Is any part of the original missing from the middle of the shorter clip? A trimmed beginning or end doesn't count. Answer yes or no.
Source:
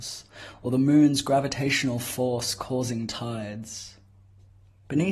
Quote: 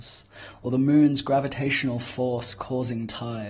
no